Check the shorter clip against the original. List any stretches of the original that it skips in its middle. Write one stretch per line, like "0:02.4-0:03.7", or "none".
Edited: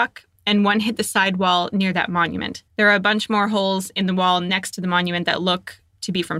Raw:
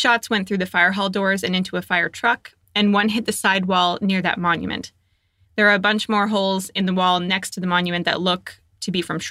0:05.0-0:05.5

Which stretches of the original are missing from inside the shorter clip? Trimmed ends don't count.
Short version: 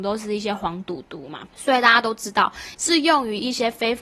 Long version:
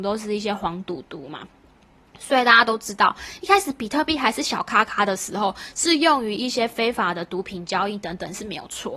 0:01.5-0:02.2
0:03.4-0:05.7

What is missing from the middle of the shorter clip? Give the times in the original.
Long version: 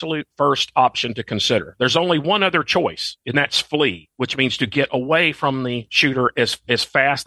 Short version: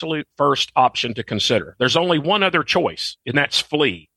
none

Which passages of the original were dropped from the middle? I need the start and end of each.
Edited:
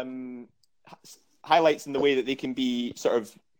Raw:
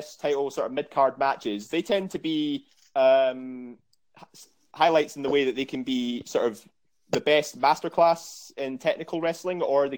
none

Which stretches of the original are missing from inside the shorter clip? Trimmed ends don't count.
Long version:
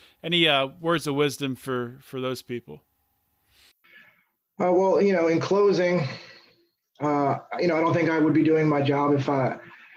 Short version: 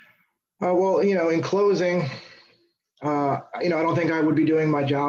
none

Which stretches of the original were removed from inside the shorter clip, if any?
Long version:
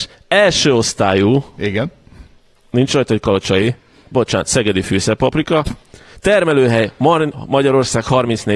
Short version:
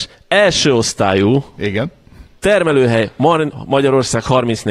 0:02.4-0:06.2

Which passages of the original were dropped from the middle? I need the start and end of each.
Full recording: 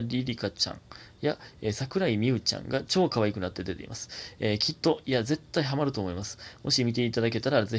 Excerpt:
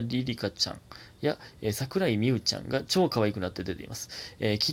none

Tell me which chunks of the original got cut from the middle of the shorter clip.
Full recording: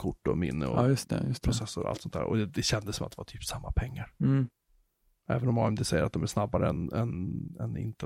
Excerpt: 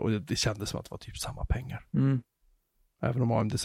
none

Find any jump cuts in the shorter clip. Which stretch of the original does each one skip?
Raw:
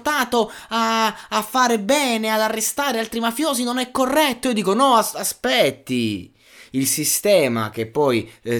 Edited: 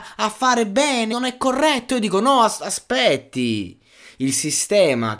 0:02.2-0:03.7

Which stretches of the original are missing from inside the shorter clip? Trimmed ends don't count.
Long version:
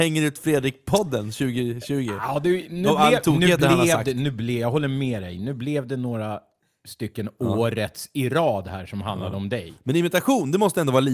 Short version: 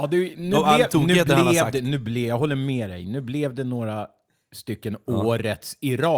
none

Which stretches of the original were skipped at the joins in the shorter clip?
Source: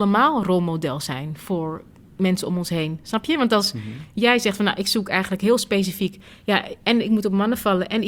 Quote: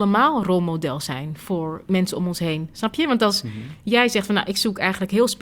0:01.9-0:02.2

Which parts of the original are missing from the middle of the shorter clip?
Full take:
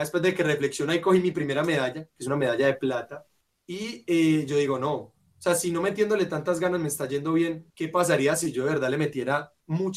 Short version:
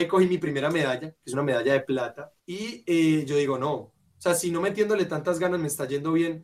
0:03.3-0:03.6

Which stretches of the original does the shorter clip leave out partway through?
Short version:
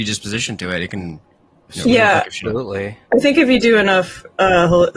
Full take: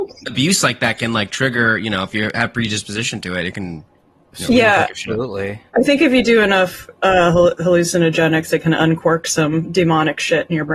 none

